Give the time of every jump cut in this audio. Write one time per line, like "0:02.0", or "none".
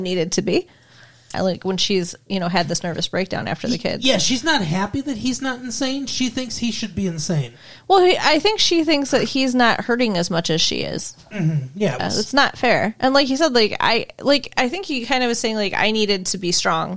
0:01.3
0:12.0